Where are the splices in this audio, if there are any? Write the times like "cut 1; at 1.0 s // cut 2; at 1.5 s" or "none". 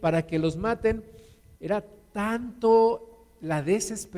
cut 1; at 1.6 s